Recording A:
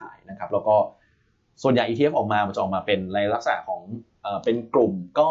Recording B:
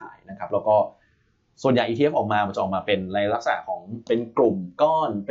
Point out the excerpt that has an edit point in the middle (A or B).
B